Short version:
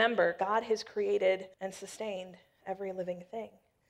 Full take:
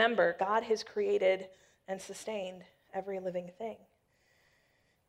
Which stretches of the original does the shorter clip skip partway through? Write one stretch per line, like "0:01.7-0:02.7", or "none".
0:01.5-0:01.8